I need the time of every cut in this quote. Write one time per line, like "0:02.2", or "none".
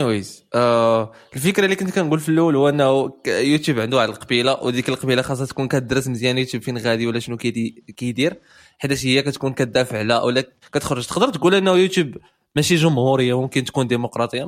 0:10.6